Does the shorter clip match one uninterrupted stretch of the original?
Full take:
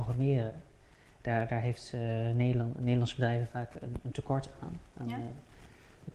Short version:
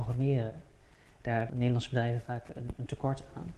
no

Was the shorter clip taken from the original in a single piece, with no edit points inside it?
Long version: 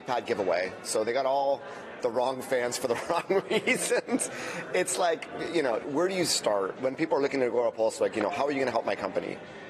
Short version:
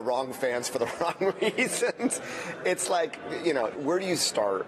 yes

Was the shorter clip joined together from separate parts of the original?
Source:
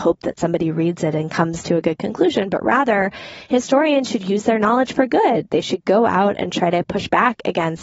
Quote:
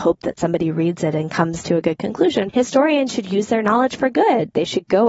yes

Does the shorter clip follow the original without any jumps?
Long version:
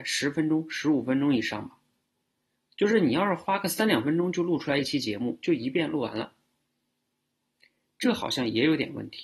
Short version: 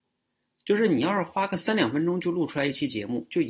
yes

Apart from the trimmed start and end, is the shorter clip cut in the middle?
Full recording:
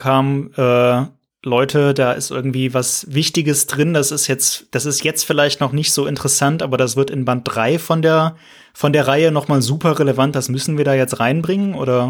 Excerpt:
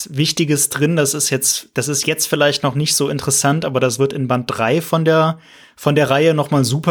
no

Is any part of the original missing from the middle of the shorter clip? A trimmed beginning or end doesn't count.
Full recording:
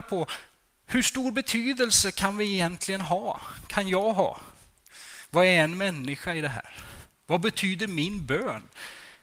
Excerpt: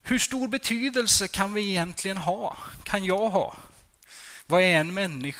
no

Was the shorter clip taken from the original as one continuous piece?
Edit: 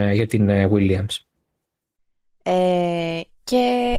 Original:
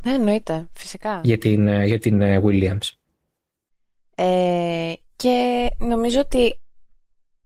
yes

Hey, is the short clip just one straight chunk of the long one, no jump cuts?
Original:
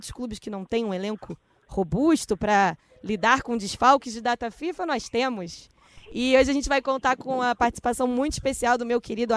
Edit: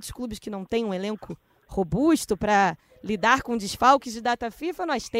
yes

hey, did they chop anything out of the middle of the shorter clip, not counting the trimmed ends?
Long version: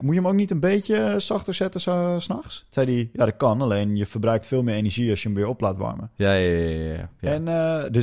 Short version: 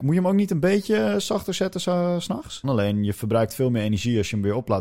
yes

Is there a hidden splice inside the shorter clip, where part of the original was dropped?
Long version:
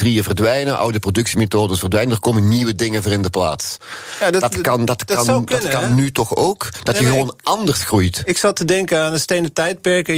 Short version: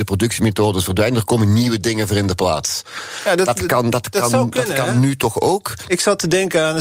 yes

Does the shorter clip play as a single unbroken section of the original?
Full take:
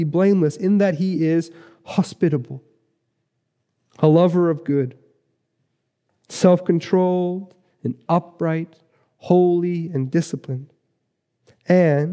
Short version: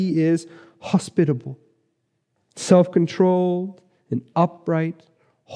no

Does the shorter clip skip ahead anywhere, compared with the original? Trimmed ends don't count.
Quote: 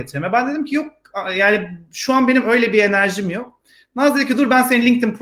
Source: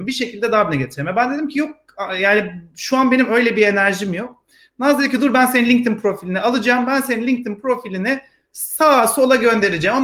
no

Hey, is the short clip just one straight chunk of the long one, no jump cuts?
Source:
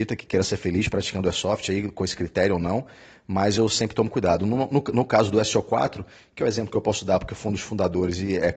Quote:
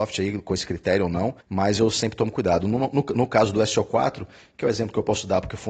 no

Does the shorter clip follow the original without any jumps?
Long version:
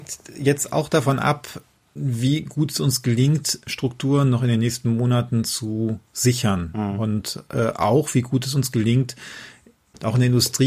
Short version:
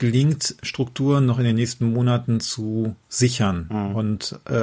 yes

